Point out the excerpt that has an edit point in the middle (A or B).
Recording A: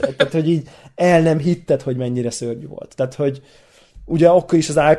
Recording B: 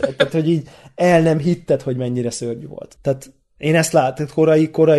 B